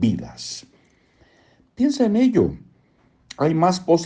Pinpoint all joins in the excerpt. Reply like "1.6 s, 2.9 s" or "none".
none